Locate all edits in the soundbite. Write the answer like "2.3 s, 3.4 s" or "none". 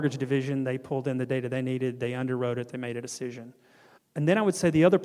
4.0 s